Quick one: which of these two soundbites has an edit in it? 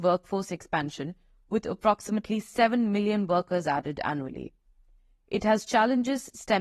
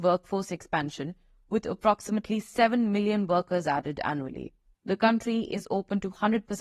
second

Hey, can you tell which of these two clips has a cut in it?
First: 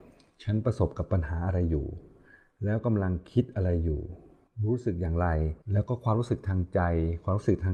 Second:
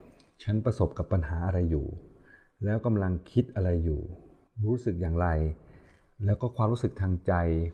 first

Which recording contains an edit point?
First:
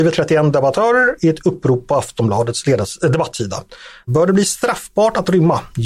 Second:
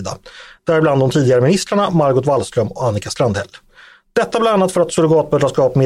first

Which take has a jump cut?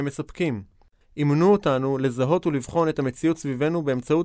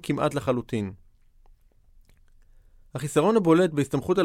first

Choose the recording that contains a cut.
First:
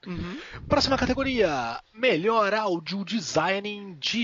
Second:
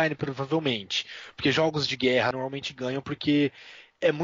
second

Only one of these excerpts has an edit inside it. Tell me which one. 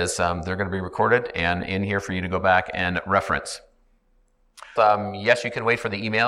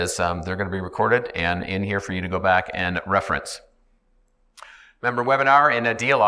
first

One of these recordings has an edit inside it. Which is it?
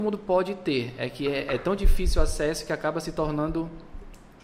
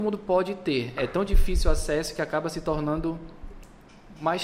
second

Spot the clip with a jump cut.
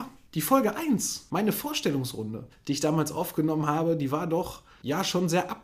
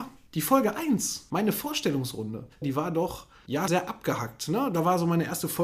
second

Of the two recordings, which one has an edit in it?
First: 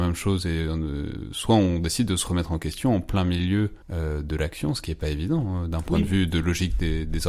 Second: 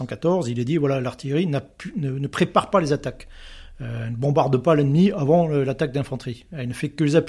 first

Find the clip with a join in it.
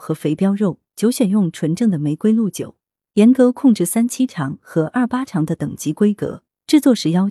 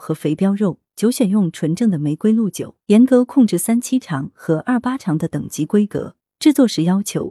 second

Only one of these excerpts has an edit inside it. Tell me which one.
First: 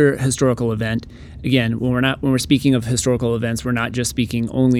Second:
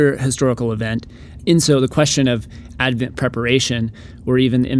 second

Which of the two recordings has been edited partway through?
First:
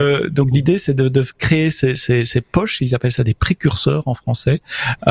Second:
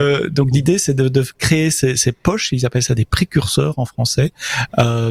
second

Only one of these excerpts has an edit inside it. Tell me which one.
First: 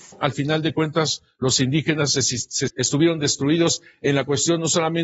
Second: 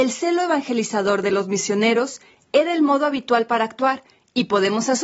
first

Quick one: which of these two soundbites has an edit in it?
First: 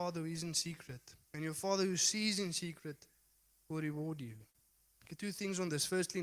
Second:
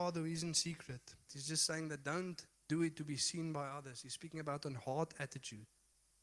second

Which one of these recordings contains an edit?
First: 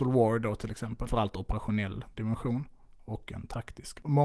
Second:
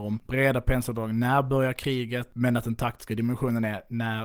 first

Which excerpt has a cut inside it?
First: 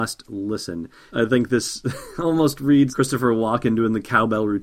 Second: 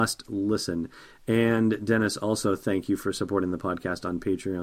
first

